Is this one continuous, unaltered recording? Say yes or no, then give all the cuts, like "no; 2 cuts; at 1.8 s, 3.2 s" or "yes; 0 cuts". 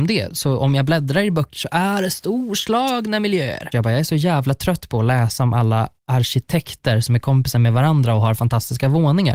no; 2 cuts; at 3.7 s, 6.0 s